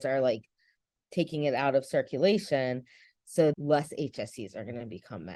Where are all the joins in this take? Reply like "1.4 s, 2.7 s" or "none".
3.5 s